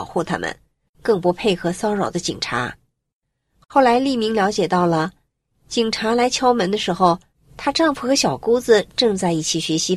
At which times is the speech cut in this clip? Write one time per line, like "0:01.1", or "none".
none